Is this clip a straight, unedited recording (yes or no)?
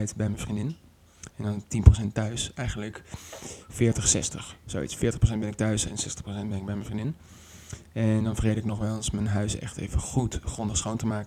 yes